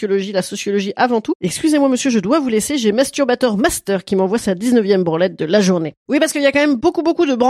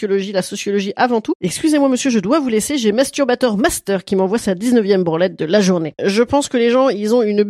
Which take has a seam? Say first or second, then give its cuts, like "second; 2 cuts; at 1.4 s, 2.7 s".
second; 1 cut; at 6.0 s